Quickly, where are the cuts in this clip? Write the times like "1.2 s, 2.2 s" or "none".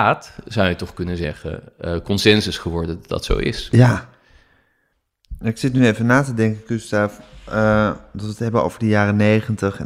none